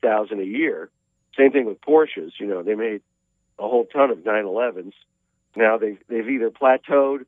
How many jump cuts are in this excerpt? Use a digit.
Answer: 2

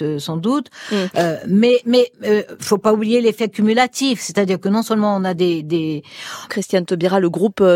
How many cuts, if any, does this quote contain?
1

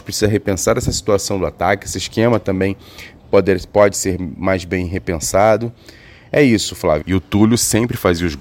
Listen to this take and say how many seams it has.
1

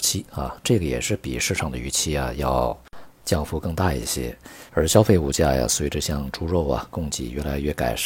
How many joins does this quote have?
1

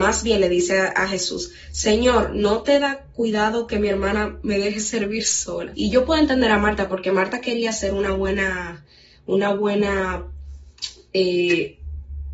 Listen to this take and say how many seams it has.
1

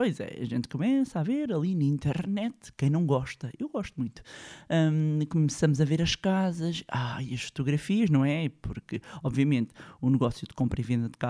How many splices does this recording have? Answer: 0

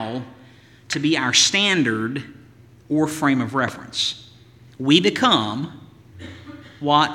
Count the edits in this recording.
1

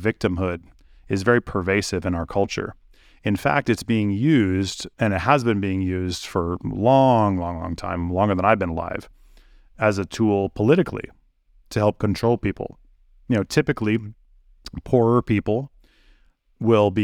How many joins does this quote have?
1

